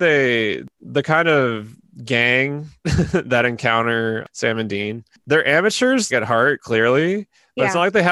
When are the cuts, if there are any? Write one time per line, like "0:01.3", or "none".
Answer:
0:06.1